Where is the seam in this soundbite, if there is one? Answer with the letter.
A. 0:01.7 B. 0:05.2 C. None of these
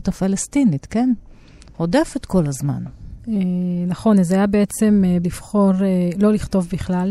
B